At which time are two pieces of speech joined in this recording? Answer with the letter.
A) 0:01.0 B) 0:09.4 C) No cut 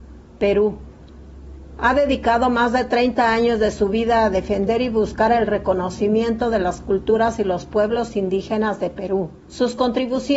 B